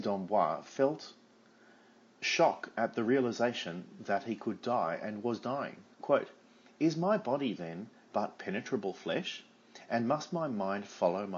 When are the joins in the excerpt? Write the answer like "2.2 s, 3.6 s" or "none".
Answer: 5.9 s